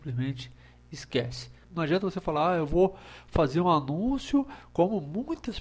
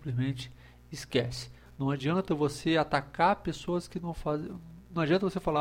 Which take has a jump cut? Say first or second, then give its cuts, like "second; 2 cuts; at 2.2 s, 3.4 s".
first; 1 cut; at 1.6 s